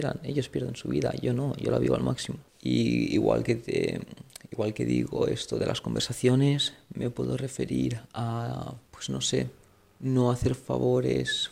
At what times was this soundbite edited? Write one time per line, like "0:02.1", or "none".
0:02.5
0:08.9